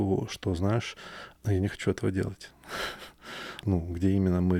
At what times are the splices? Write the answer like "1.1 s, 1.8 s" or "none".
1.3 s, 3.6 s